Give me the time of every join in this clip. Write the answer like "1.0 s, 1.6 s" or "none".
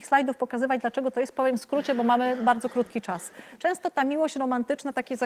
3.6 s